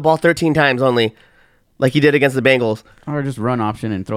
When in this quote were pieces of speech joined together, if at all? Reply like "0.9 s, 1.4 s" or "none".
none